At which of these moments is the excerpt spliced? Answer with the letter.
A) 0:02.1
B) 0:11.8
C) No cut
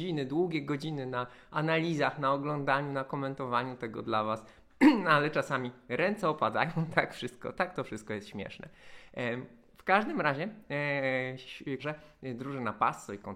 B